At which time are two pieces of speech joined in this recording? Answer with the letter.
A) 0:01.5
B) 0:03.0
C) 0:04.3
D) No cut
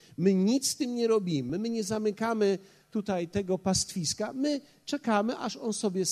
A